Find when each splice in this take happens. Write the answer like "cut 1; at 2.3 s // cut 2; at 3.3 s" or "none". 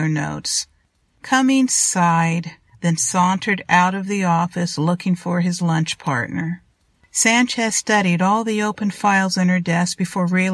cut 1; at 2.7 s